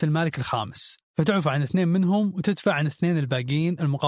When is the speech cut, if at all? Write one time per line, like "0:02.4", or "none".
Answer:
0:01.1